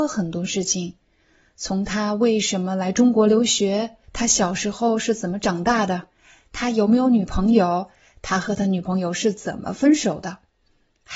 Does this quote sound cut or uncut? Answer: cut